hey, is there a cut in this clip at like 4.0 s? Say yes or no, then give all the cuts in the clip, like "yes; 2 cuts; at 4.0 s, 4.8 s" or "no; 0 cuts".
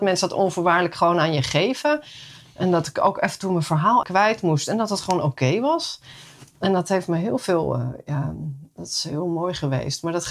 yes; 1 cut; at 4.0 s